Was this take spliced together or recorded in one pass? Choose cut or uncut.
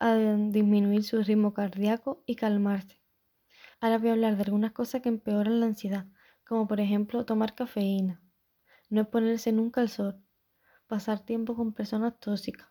cut